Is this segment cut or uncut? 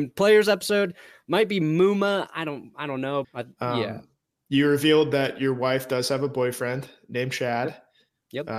cut